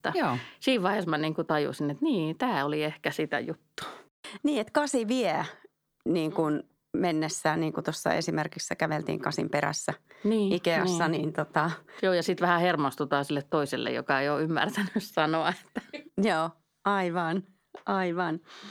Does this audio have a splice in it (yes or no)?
no